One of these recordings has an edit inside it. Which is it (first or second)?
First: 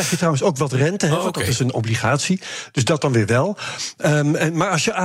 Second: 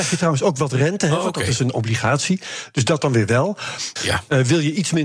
second